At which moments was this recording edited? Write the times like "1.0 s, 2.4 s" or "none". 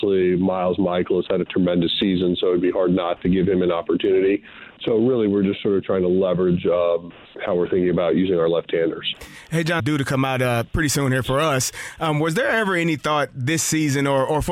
9.8 s